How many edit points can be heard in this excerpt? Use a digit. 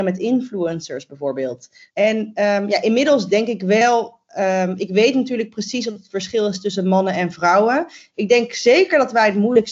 1